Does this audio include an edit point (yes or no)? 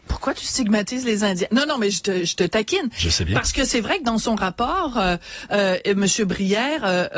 no